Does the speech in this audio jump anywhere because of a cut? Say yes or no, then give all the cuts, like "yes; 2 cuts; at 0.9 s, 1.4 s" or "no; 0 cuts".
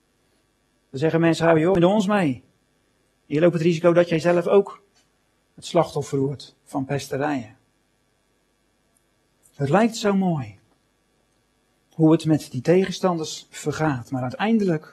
no; 0 cuts